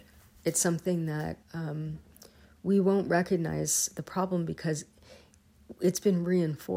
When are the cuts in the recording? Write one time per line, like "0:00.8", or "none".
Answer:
0:01.4